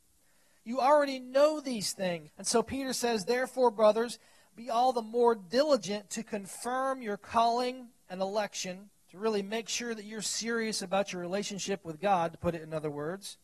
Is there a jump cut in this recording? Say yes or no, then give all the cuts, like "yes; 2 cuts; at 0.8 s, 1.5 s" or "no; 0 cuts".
yes; 2 cuts; at 2.3 s, 9.0 s